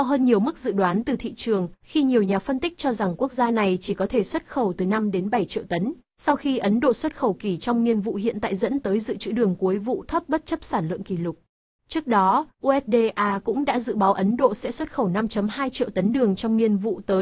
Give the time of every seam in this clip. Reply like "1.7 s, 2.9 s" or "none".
none